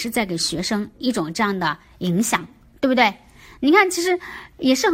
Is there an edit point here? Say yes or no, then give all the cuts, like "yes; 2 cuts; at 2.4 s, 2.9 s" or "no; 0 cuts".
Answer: no; 0 cuts